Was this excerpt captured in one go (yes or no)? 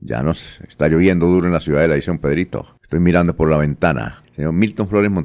no